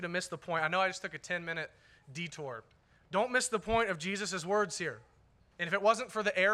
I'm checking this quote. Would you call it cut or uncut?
uncut